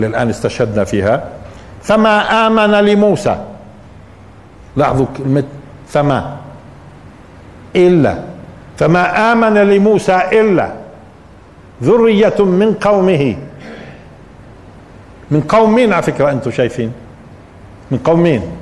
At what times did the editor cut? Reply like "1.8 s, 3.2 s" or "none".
none